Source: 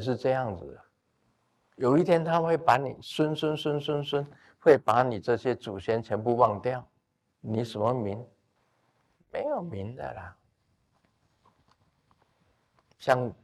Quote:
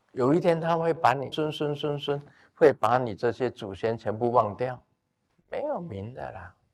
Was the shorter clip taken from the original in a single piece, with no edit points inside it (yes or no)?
no